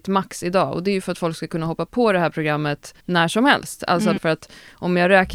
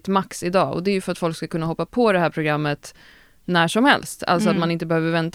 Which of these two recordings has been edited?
first; 2 cuts; at 3.0 s, 4.2 s

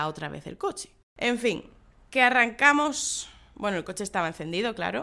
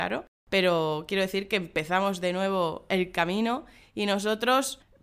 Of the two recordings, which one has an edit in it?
first; 1 cut; at 1.0 s

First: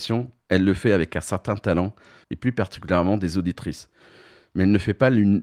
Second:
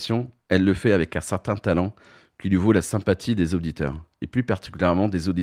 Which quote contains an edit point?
first; 1 cut; at 2.2 s

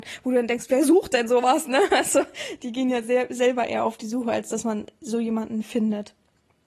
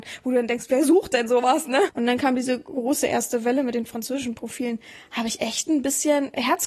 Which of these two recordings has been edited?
second; 1 cut; at 1.9 s

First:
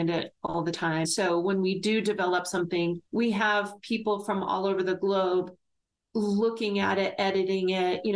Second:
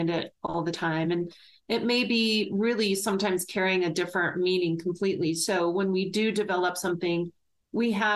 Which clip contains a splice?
first; 2 cuts; at 1.0 s, 3.1 s

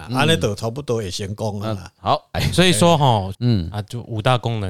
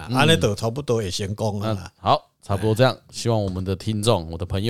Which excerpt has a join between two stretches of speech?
first; 2 cuts; at 2.3 s, 3.3 s

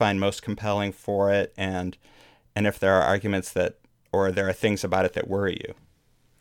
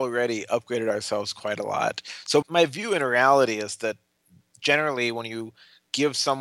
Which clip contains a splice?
second; 1 cut; at 2.4 s

